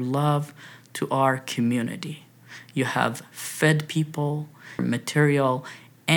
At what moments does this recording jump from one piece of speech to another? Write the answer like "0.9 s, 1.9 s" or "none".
4.8 s